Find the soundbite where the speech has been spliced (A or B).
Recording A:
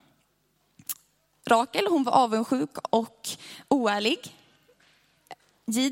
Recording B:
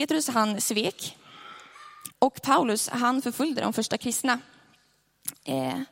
B